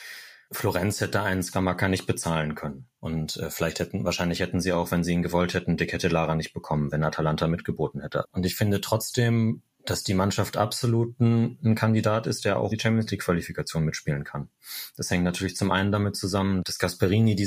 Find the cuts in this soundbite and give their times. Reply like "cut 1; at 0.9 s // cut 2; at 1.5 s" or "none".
cut 1; at 3.0 s // cut 2; at 8.2 s // cut 3; at 12.7 s

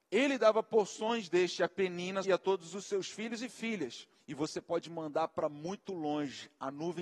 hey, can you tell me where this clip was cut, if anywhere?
cut 1; at 2.2 s // cut 2; at 4.2 s

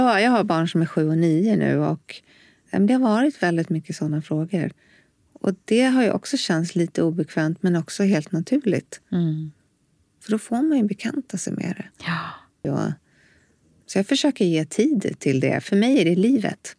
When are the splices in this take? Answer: cut 1; at 12.6 s

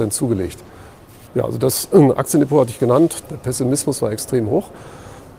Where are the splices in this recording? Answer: cut 1; at 1.3 s // cut 2; at 3.2 s

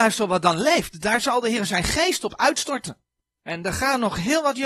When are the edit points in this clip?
none

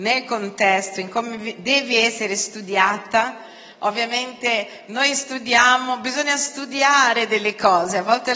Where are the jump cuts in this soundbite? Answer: none

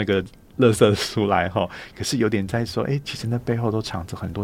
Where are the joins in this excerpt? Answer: cut 1; at 3.0 s

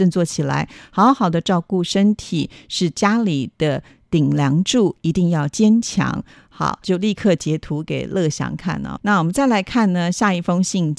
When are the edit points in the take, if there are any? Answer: cut 1; at 6.8 s // cut 2; at 9.0 s

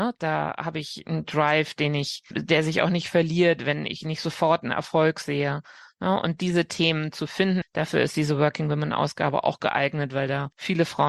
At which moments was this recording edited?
cut 1; at 2.3 s // cut 2; at 7.6 s

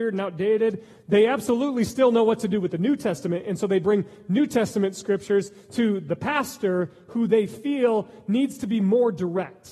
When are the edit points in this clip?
none

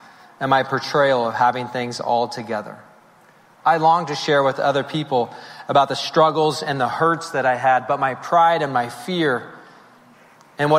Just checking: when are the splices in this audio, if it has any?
none

